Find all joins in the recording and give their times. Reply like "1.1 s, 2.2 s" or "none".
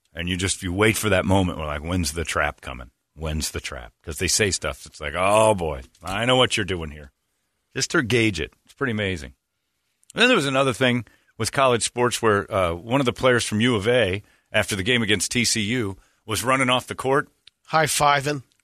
none